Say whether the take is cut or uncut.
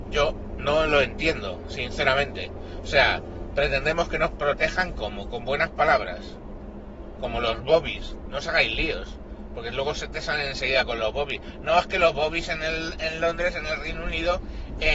uncut